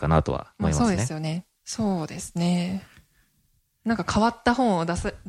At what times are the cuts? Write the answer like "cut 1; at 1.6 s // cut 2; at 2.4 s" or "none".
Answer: cut 1; at 1.6 s